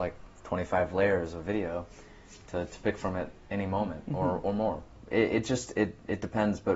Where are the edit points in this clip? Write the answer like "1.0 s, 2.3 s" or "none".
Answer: none